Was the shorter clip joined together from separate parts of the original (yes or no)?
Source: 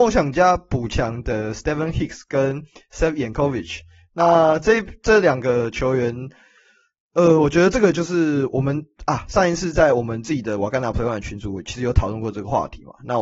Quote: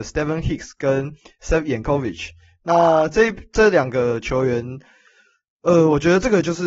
no